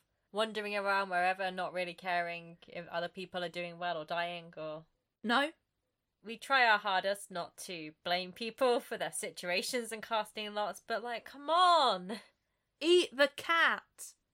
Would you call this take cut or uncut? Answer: cut